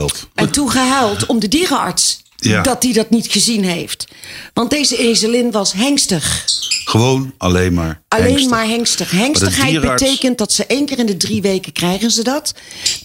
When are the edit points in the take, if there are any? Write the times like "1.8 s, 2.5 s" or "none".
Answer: none